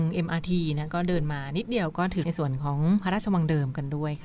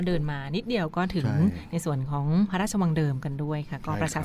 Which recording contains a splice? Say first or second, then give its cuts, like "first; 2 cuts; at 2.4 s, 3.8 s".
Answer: first; 1 cut; at 2.2 s